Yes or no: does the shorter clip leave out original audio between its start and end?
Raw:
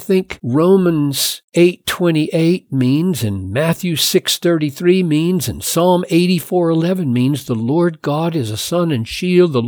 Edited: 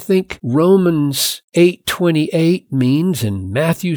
no